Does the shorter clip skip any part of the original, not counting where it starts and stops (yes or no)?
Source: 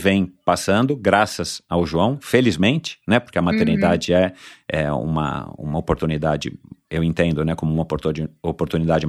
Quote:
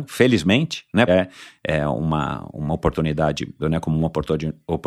yes